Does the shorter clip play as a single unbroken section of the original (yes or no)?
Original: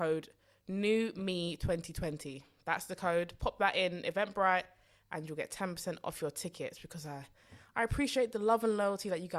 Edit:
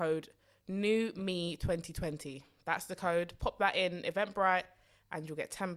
yes